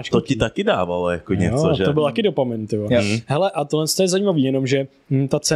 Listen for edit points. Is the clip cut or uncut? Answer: uncut